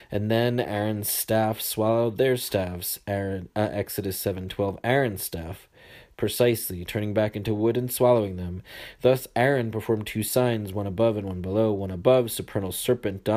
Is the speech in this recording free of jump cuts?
yes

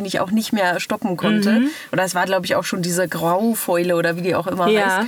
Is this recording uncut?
yes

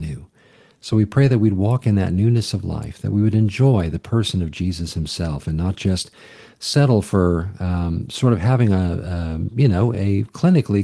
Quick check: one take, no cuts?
yes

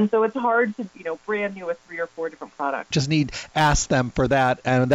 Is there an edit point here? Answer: yes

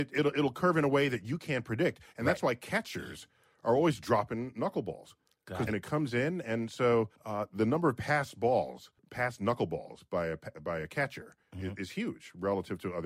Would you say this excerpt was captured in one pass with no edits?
no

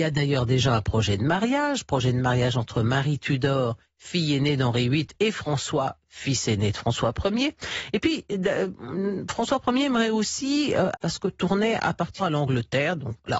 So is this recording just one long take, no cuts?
no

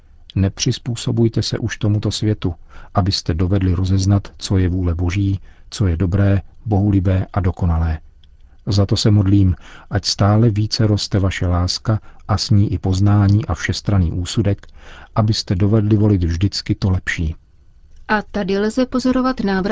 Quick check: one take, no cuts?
no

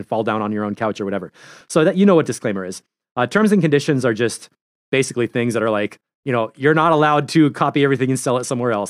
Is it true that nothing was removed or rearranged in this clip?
yes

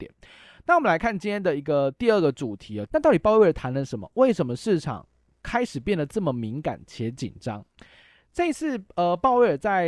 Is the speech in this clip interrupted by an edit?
yes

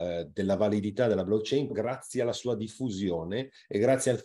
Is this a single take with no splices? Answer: no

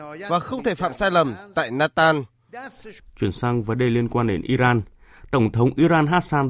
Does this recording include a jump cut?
yes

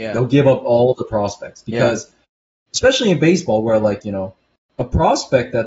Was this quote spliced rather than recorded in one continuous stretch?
no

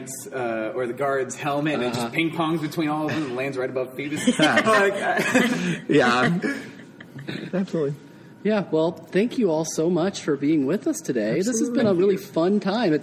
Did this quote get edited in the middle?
yes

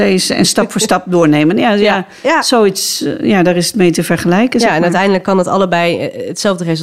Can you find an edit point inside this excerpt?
no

